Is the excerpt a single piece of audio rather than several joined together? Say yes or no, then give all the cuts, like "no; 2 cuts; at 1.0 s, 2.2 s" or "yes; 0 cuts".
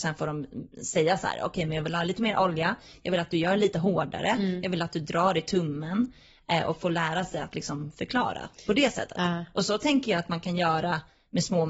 yes; 0 cuts